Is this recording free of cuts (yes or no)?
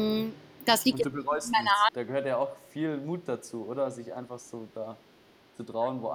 no